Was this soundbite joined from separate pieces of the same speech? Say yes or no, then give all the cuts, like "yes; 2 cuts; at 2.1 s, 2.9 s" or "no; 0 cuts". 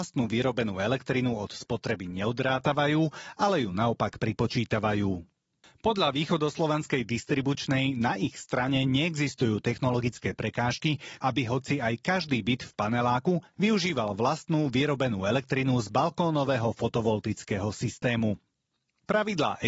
yes; 2 cuts; at 11.2 s, 13.5 s